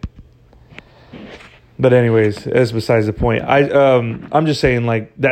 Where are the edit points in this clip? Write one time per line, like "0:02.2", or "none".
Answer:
none